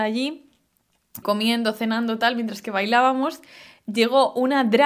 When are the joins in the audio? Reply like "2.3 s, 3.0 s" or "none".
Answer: 1.2 s